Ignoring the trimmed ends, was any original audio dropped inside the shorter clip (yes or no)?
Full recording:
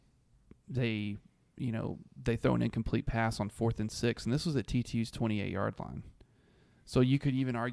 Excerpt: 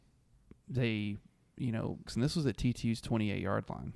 yes